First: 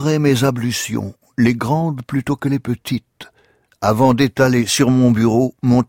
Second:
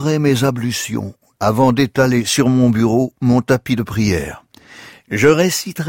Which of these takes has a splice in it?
second; 1 cut; at 1.4 s

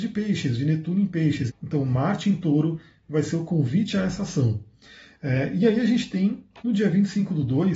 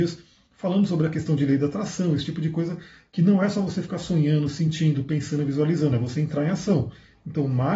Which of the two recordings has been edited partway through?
first; 2 cuts; at 1.5 s, 6.6 s

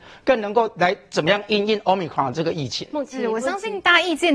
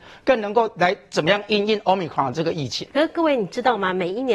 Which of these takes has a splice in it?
second; 1 cut; at 2.9 s

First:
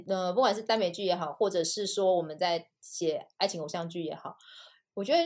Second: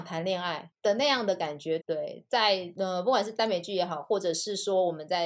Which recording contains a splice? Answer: second; 1 cut; at 1.8 s

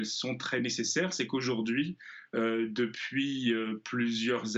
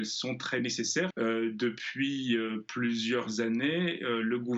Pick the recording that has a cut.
second; 1 cut; at 1.1 s

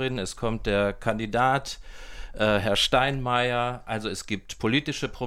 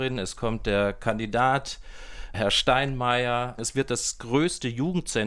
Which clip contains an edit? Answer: second; 2 cuts; at 2.3 s, 3.6 s

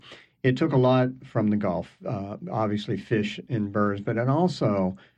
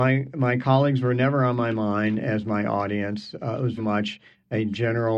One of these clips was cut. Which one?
second; 1 cut; at 3.8 s

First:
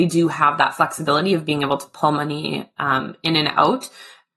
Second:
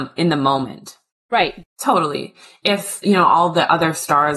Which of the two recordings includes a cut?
second; 1 cut; at 1.6 s

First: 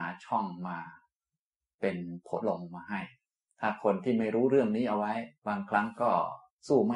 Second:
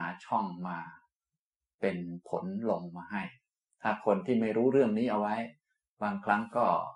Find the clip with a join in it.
first; 2 cuts; at 2.4 s, 5.4 s

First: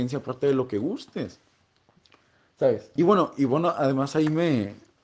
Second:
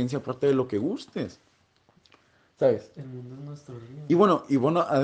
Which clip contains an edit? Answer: first; 1 cut; at 3.0 s

